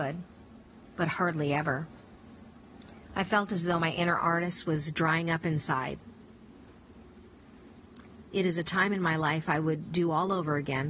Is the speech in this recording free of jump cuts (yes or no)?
yes